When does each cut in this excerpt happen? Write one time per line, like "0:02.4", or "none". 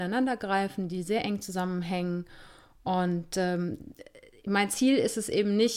none